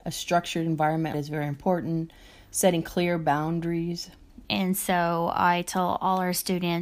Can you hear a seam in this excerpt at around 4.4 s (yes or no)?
yes